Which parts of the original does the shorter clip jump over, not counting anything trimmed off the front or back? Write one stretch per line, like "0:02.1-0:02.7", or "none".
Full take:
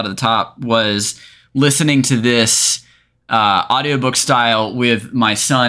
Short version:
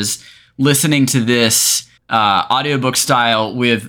0:02.9-0:03.2